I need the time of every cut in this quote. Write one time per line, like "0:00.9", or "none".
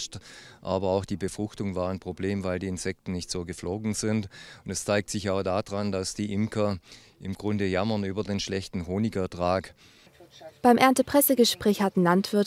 none